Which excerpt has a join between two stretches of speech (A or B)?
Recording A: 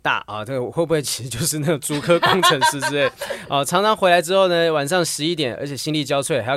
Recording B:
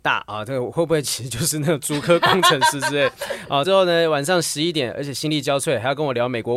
B